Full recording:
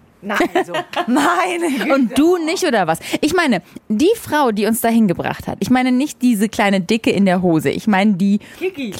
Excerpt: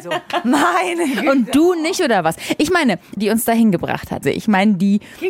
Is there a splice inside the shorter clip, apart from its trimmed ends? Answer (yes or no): yes